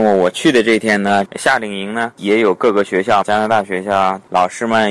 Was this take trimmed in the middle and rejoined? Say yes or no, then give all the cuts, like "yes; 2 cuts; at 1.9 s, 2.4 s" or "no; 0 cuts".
yes; 2 cuts; at 1.3 s, 3.2 s